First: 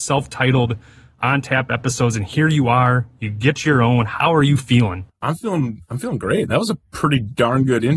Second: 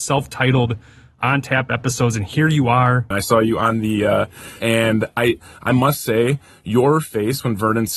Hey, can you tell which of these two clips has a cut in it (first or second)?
second